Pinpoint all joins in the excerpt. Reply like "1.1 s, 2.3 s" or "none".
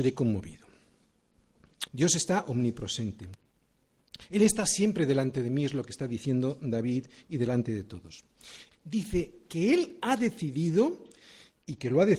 1.9 s, 8.7 s